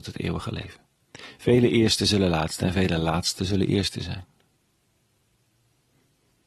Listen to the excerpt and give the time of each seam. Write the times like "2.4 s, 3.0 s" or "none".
none